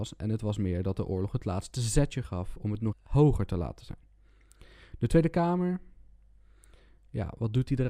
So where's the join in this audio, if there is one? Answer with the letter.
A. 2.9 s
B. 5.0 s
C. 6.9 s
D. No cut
A